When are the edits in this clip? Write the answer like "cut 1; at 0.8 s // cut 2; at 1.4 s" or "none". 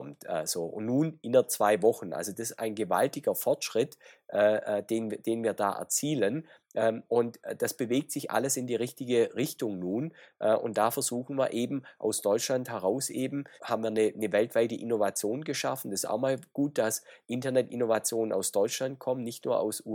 cut 1; at 13.6 s